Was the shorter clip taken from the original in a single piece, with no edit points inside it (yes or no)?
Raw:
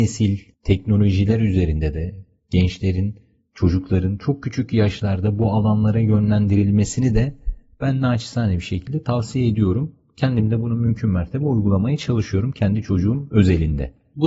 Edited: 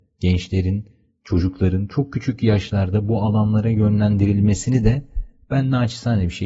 yes